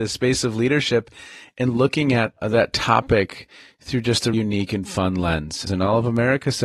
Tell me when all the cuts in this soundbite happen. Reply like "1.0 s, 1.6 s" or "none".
4.3 s, 5.7 s